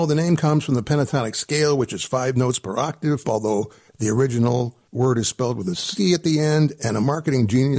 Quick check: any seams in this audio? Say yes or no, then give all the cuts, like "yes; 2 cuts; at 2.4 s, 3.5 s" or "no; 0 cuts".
yes; 2 cuts; at 3.2 s, 4.9 s